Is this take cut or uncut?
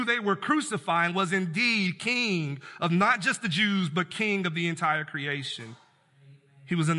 uncut